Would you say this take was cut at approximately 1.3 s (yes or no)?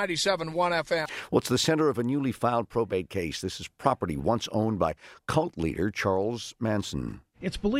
no